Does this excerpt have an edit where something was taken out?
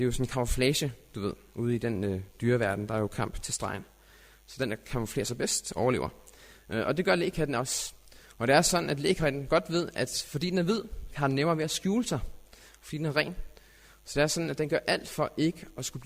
yes; 1 cut; at 11.1 s

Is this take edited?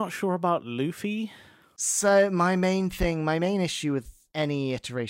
no; 0 cuts

